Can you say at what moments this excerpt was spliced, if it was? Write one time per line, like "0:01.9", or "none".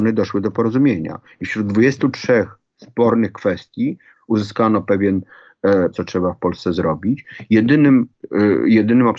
0:04.1
0:05.9

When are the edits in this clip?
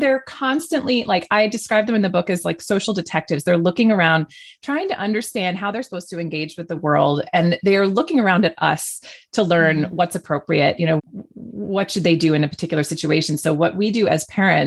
0:11.0

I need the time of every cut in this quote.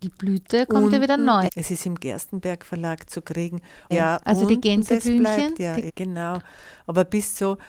0:01.5
0:03.9
0:05.9

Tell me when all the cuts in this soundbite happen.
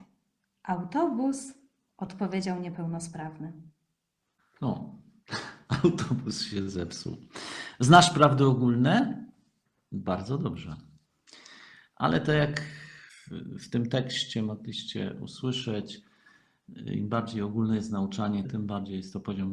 0:18.4

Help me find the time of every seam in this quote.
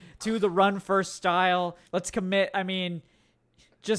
0:01.9

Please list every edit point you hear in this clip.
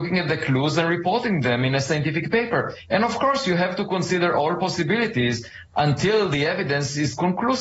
none

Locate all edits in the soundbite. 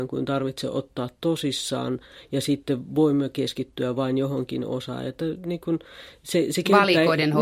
none

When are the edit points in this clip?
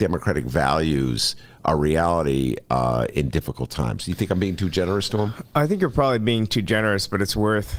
none

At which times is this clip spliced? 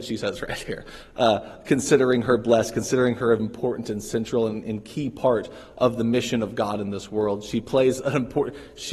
0:03.4

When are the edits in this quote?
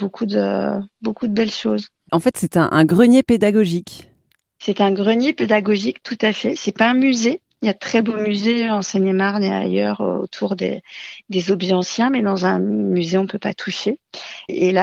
none

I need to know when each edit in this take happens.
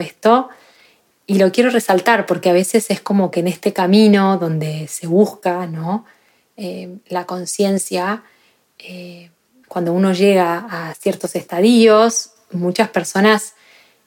0:01.1

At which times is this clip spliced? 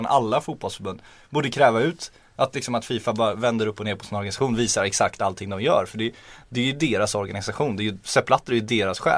0:08.0

